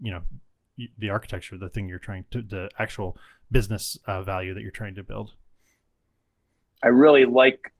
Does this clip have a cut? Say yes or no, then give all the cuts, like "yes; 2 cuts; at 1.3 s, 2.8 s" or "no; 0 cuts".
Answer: no; 0 cuts